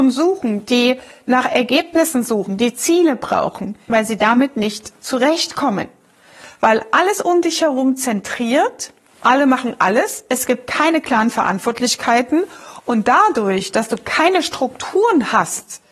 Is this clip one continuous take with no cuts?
no; 2 cuts; at 3.9 s, 6.4 s

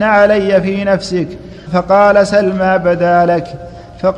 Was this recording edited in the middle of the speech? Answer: yes; 1 cut; at 1.7 s

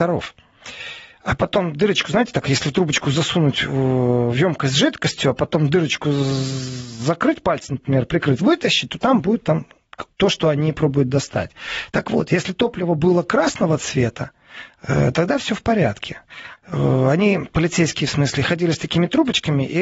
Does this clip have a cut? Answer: yes; 2 cuts; at 10.1 s, 16.6 s

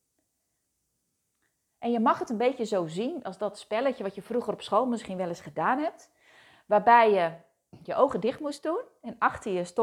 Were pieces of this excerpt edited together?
no; 0 cuts

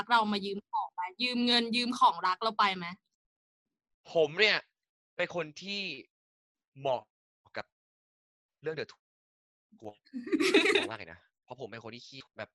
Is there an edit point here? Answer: no; 0 cuts

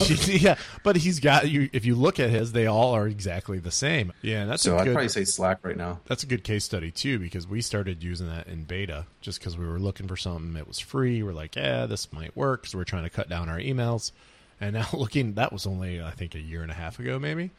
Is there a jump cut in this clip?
yes; 1 cut; at 4.1 s

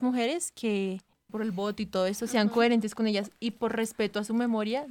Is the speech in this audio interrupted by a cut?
yes; 1 cut; at 1.3 s

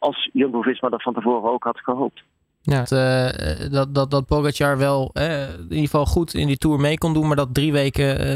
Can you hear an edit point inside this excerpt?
yes; 1 cut; at 2.8 s

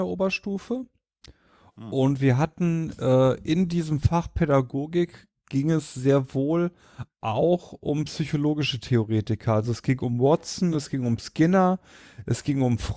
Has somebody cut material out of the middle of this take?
no; 0 cuts

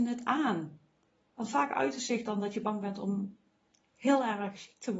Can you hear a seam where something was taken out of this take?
yes; 1 cut; at 1.2 s

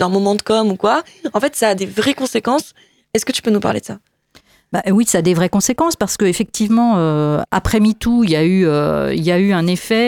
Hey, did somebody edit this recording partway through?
no; 0 cuts

